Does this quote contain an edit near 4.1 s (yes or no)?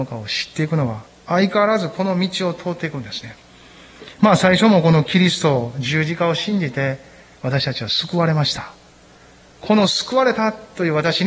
no